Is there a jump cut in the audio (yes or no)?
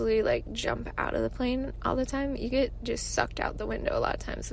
no